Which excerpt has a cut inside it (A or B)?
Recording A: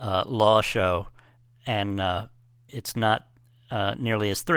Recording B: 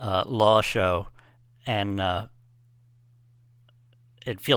A